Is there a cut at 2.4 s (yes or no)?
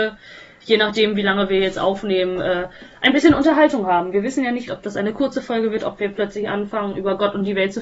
no